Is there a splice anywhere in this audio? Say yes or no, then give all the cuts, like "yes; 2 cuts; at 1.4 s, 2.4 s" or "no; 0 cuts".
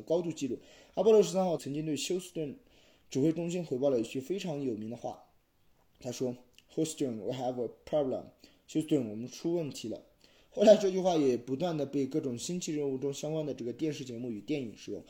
yes; 1 cut; at 1.6 s